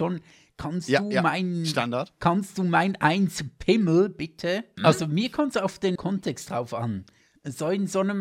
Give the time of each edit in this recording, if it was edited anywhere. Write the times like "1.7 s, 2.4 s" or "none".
4.8 s, 6.0 s